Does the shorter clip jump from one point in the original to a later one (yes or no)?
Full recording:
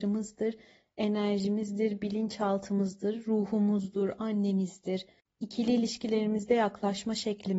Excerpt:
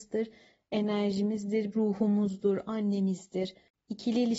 yes